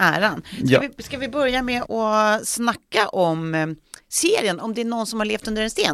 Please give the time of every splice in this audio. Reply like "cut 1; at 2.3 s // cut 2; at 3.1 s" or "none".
cut 1; at 1.8 s

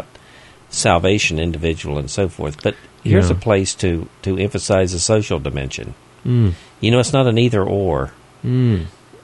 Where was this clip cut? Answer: none

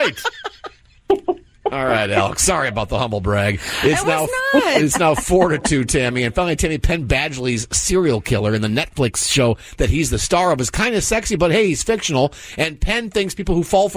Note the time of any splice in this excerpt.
none

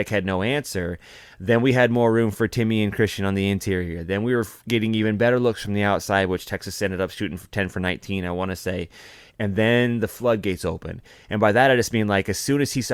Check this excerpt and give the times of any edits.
cut 1; at 9.3 s

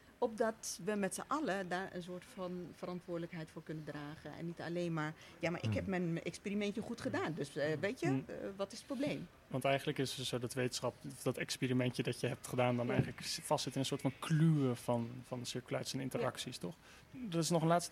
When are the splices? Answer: cut 1; at 17.0 s

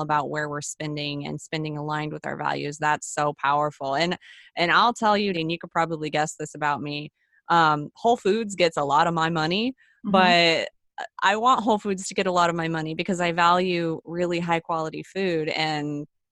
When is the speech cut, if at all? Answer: cut 1; at 5.3 s

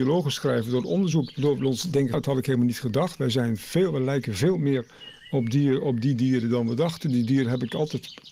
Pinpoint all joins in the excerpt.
cut 1; at 2.1 s

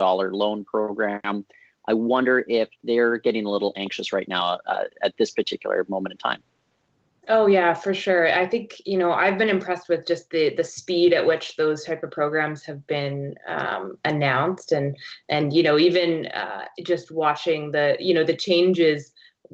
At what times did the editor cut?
none

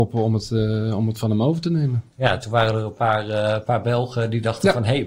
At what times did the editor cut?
none

